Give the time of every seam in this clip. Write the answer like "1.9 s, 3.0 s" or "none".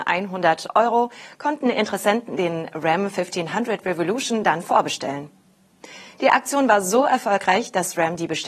none